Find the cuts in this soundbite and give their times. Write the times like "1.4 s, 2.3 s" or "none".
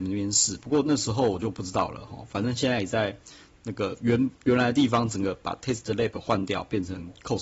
none